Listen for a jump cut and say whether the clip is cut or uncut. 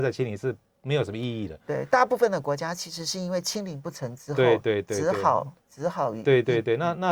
uncut